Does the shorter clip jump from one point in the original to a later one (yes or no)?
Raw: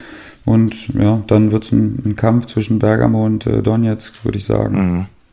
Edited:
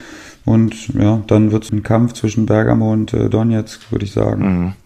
yes